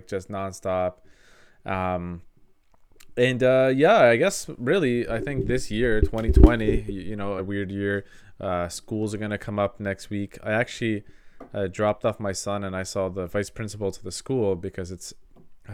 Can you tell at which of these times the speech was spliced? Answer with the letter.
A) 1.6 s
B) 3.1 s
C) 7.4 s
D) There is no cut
C